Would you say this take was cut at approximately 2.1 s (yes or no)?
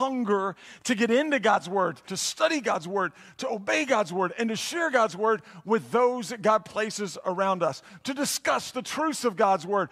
yes